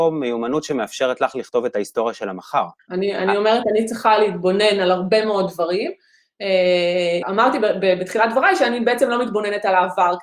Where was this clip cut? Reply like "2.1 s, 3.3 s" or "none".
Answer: 7.2 s